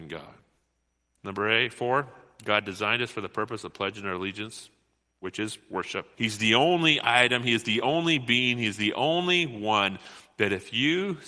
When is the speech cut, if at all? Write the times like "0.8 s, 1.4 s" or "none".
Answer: 6.1 s